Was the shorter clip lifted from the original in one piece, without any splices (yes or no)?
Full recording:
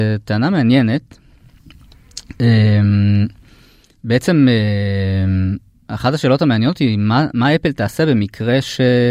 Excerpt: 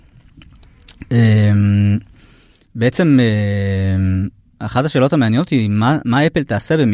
yes